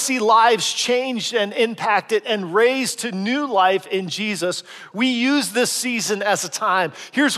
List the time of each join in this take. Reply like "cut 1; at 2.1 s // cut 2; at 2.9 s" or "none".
cut 1; at 4.9 s